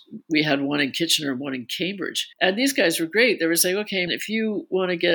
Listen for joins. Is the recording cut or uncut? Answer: cut